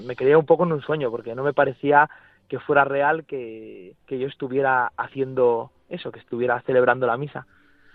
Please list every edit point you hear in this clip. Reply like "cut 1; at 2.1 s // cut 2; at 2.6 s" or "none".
cut 1; at 4.0 s